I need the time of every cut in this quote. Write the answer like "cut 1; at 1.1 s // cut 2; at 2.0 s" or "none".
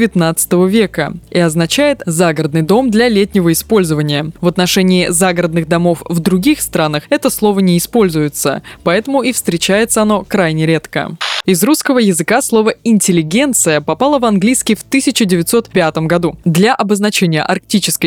cut 1; at 4.3 s // cut 2; at 11.4 s // cut 3; at 16.4 s

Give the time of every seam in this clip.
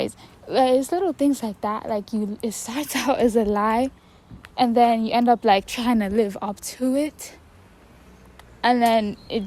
none

